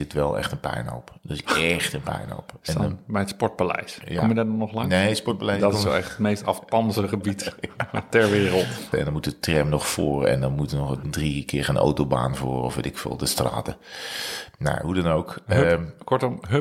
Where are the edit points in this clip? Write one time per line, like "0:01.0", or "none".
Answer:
0:08.9
0:11.0